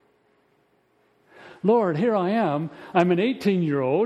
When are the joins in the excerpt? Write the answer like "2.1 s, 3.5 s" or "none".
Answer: none